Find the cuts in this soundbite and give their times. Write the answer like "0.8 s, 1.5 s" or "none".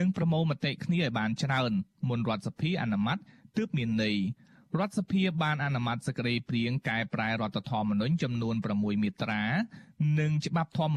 none

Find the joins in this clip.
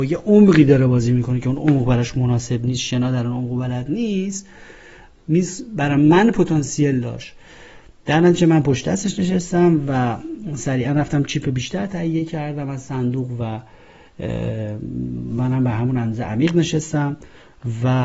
none

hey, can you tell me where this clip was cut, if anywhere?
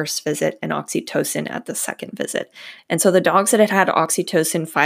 2.8 s

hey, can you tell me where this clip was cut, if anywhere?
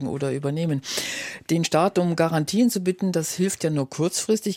none

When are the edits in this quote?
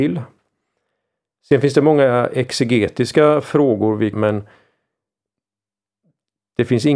4.1 s

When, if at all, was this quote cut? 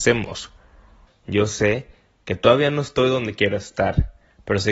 1.1 s

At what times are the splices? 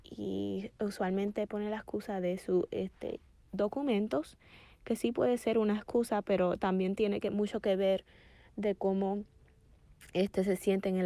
none

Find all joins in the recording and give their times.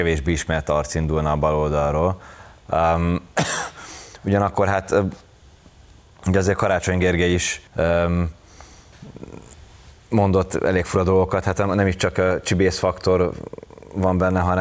7.7 s

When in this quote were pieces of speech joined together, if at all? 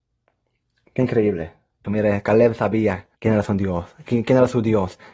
1.8 s, 3.1 s

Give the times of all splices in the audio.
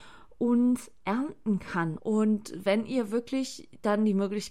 2.0 s

